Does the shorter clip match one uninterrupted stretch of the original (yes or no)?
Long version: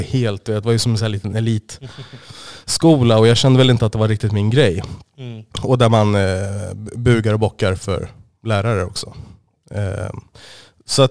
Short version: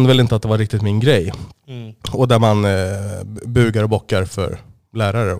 yes